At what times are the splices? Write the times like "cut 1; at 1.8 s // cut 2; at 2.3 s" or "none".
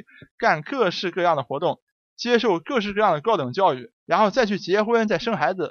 cut 1; at 4.0 s